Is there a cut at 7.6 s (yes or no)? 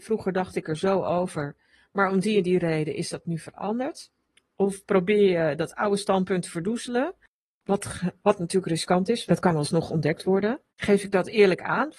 no